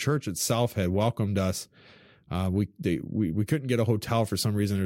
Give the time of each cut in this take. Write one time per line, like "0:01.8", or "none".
none